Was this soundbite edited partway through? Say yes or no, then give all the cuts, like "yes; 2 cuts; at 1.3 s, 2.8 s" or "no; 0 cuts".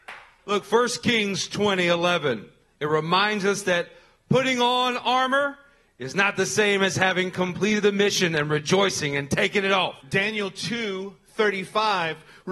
yes; 1 cut; at 10.0 s